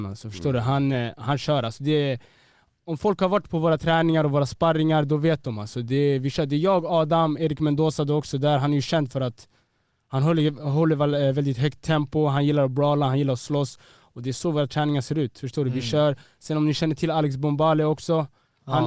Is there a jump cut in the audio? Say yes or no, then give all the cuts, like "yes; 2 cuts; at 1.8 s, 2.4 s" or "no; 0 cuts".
no; 0 cuts